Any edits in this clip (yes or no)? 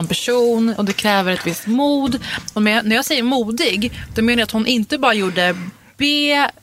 no